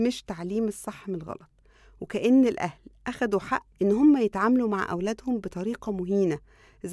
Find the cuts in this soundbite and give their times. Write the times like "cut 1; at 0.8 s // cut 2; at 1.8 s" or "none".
cut 1; at 3.7 s